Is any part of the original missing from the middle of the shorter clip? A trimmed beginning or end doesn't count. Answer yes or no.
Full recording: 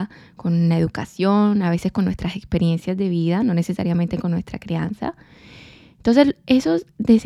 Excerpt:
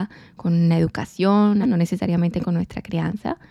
yes